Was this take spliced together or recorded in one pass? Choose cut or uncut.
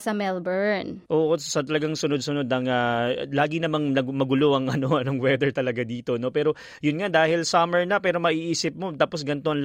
cut